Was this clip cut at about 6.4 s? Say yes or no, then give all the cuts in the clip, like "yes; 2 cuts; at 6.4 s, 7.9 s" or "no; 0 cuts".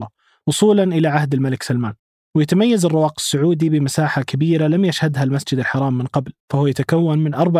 yes; 1 cut; at 6.4 s